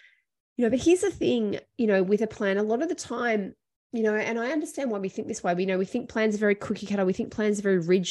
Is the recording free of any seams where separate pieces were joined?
yes; 0 cuts

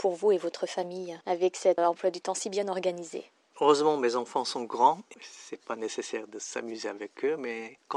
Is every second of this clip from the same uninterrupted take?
no; 2 cuts; at 1.8 s, 5.1 s

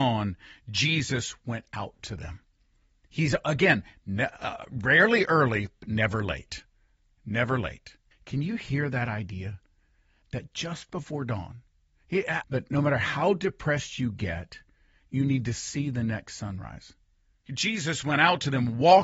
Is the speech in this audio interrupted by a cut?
yes; 3 cuts; at 8.1 s, 12.4 s, 17.5 s

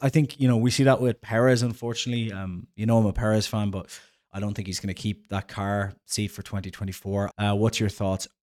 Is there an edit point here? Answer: yes; 1 cut; at 7.3 s

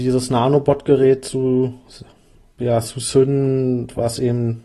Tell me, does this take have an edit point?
no; 0 cuts

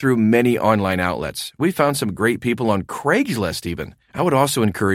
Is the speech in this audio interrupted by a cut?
yes; 1 cut; at 4.0 s

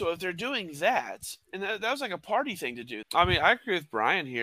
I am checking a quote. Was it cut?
yes; 1 cut; at 3.0 s

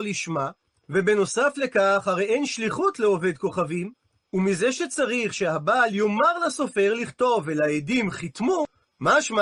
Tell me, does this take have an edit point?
no; 0 cuts

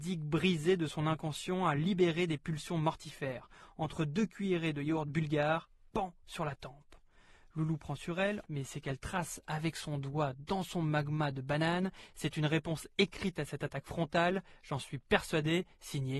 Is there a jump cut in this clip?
yes; 1 cut; at 8.5 s

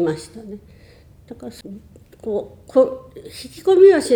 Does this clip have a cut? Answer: no; 0 cuts

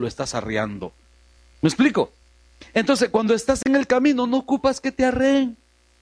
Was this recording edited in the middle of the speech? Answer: no; 0 cuts

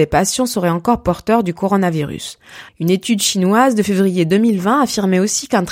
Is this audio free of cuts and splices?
no; 1 cut; at 2.7 s

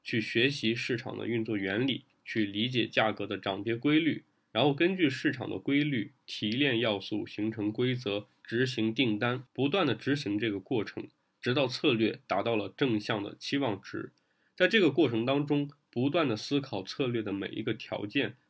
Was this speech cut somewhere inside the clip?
yes; 1 cut; at 9.5 s

